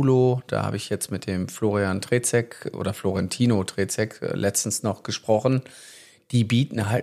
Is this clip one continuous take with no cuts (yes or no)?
yes